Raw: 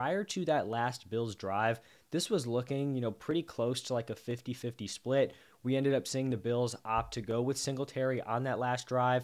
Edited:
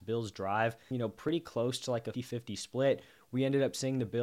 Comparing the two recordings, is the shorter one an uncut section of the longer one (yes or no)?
no